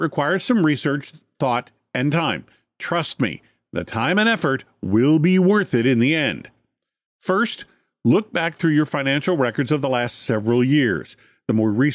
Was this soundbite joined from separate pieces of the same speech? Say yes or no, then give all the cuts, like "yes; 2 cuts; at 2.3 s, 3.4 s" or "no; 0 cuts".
no; 0 cuts